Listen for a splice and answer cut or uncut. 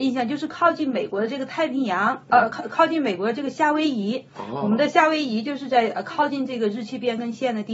uncut